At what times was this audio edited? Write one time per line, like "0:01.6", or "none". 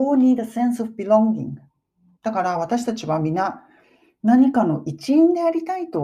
0:02.1